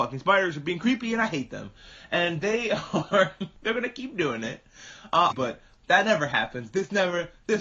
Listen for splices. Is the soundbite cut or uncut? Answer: cut